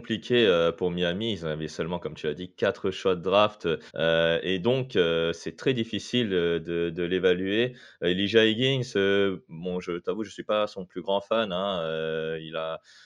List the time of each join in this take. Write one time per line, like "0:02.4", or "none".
0:03.9